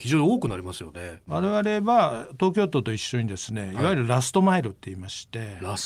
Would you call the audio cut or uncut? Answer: cut